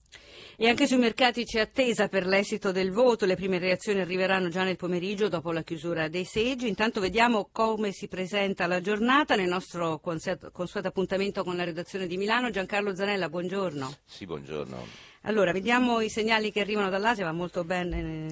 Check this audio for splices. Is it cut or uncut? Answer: uncut